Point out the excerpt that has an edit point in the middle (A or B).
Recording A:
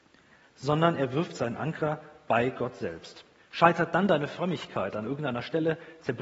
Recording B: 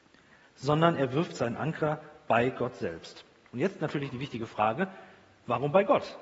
A